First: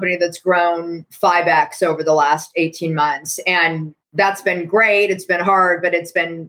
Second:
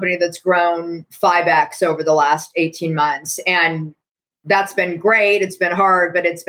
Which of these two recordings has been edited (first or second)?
first